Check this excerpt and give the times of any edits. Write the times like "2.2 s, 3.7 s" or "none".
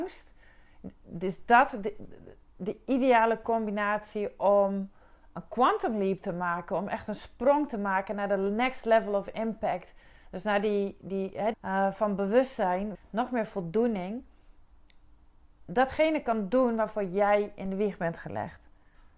11.5 s, 12.9 s